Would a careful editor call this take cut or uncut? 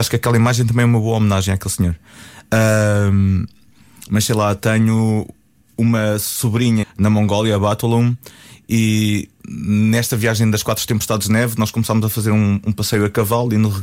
cut